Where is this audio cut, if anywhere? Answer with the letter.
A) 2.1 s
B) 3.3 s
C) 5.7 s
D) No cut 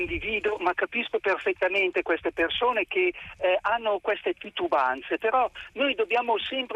D